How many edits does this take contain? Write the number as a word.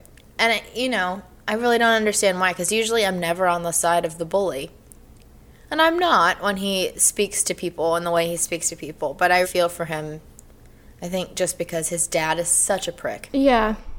one